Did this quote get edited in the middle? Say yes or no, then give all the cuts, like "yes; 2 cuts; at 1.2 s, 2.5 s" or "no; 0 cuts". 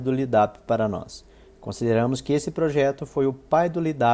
no; 0 cuts